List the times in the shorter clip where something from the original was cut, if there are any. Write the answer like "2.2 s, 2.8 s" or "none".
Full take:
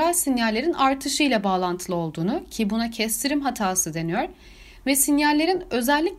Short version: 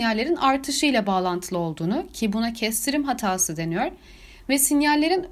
none